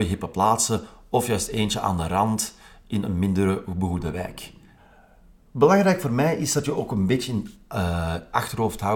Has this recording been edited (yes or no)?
no